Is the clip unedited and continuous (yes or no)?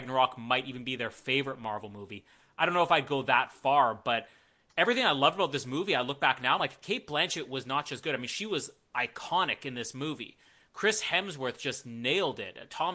yes